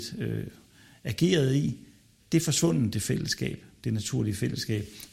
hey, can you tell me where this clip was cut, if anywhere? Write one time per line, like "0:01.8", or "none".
none